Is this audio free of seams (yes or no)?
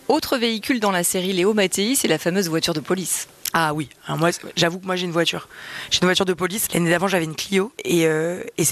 no